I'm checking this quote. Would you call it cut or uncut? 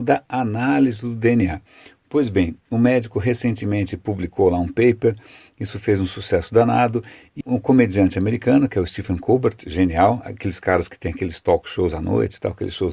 cut